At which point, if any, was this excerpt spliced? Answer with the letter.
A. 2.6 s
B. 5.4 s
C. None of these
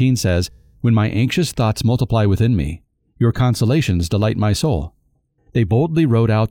B